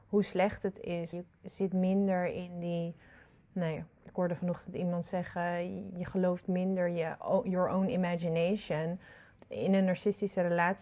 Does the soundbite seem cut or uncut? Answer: cut